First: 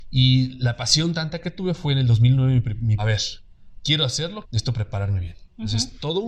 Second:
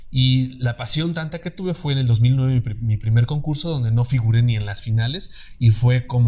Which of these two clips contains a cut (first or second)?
first